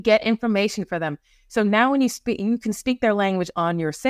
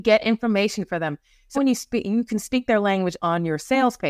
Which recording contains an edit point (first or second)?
second